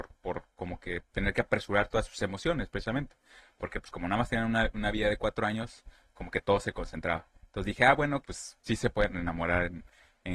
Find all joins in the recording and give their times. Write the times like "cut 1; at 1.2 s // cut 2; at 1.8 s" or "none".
cut 1; at 8.2 s